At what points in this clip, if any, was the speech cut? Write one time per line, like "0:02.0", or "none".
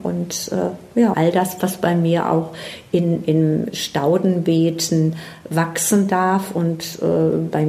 0:01.1

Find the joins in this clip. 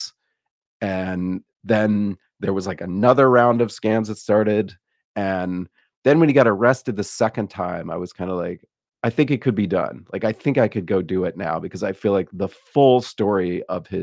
0:05.0

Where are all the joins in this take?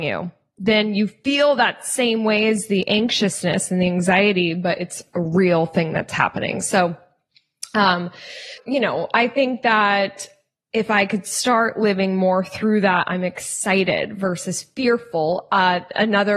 0:08.6

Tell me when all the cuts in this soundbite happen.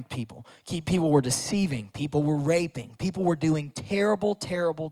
none

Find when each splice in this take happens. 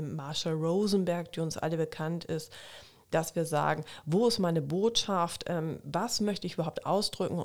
none

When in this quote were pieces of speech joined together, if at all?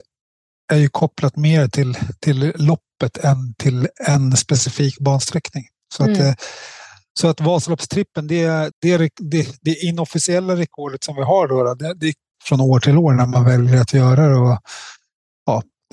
0:08.7
0:12.3

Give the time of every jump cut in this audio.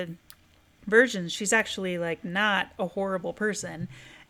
none

